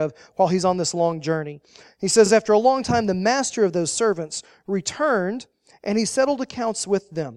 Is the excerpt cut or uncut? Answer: uncut